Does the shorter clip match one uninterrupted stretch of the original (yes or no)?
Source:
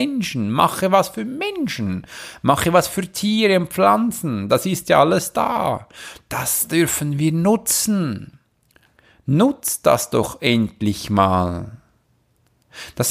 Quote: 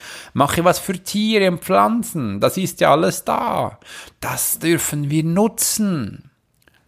yes